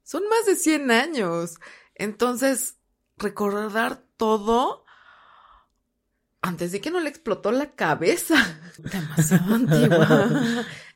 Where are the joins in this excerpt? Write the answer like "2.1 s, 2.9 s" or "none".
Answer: 8.8 s